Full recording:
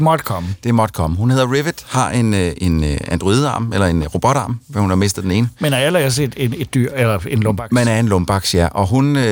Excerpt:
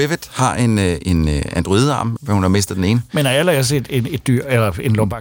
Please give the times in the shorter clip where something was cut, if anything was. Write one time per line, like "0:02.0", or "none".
0:02.2